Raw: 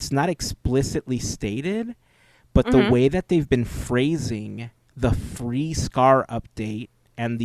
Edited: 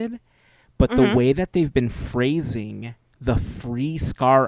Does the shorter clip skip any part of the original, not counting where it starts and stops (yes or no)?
no